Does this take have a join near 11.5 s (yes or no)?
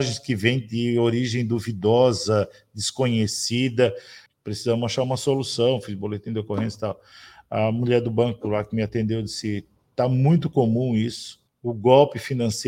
yes